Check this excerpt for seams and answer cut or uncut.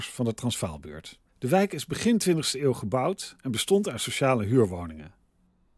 cut